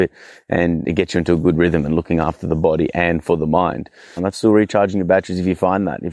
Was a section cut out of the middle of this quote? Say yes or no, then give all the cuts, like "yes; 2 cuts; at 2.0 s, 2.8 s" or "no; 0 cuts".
yes; 1 cut; at 4.2 s